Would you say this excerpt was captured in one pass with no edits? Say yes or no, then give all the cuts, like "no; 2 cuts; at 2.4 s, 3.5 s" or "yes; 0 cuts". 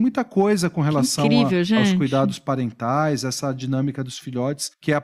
yes; 0 cuts